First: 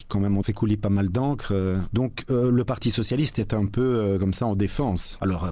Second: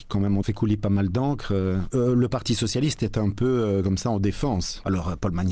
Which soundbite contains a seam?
second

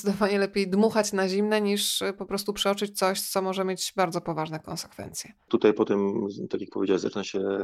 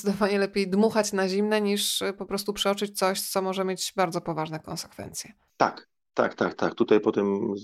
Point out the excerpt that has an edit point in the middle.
first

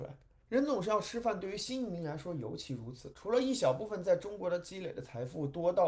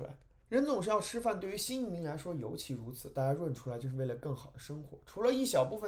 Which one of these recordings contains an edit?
first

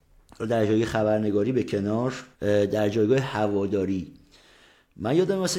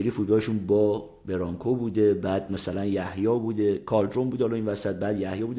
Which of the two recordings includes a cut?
first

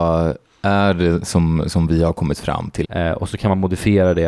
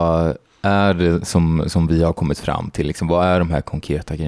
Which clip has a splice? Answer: first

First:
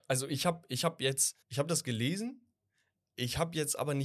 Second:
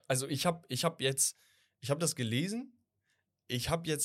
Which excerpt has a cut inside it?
first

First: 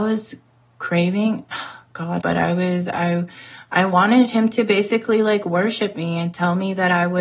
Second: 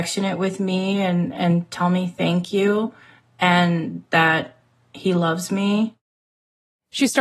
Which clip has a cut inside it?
first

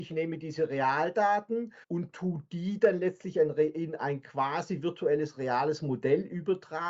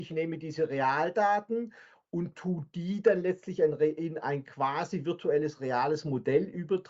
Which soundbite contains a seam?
first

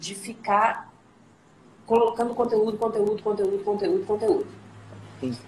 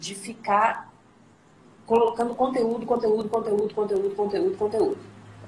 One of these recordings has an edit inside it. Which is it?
first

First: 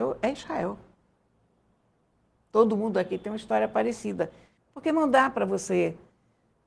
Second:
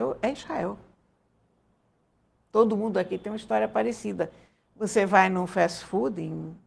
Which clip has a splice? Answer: first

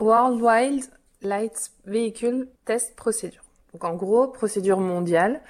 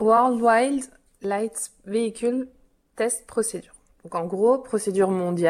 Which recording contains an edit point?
first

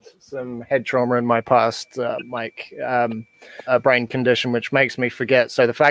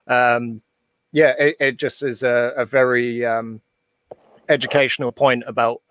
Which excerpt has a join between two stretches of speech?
first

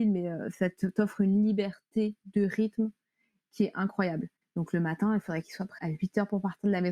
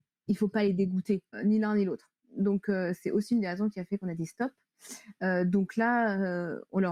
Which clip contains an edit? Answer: first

